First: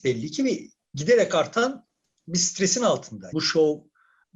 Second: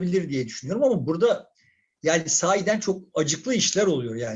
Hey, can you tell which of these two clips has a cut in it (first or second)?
first